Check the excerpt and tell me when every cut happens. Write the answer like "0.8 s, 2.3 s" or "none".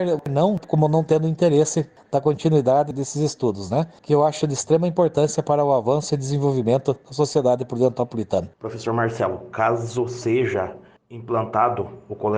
8.5 s